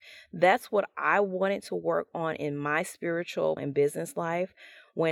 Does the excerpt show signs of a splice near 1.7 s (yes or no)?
no